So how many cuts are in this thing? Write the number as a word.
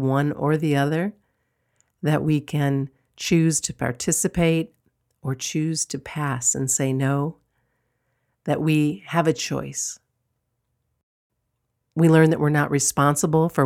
zero